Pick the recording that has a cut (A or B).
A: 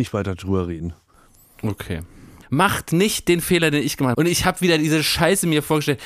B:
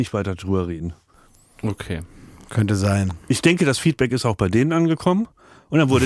A